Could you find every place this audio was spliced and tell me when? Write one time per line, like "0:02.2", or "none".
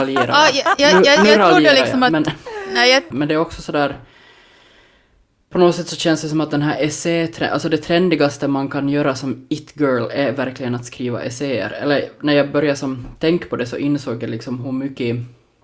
0:03.1